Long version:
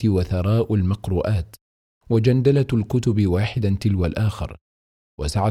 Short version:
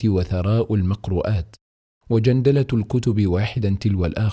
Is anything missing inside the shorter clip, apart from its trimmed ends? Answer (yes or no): no